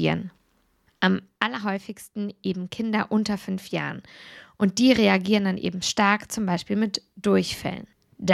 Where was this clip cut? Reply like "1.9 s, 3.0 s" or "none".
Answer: none